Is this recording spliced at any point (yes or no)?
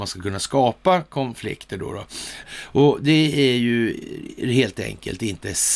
yes